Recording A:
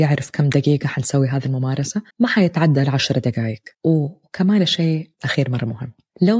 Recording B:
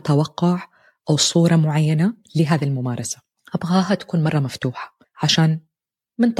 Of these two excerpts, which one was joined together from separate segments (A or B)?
A